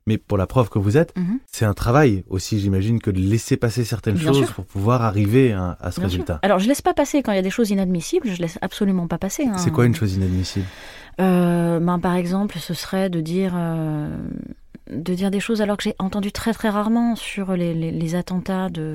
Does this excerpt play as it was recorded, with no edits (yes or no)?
yes